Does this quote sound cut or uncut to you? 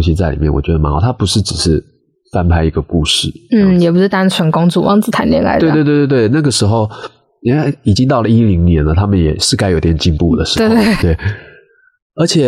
cut